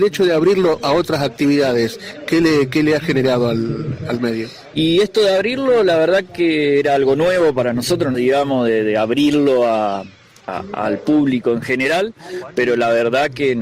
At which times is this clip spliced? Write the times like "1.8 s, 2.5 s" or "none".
4.7 s, 8.1 s